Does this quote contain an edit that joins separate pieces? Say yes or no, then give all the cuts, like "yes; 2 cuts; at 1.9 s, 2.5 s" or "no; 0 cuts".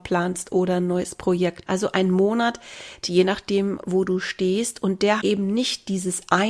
yes; 3 cuts; at 1.7 s, 3.0 s, 5.2 s